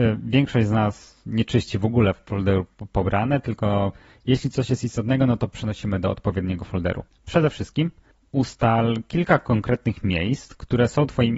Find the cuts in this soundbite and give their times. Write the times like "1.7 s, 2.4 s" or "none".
7.1 s